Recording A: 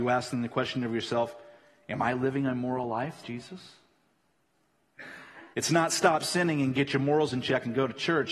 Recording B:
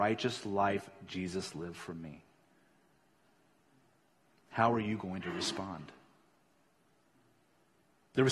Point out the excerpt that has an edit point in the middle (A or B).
A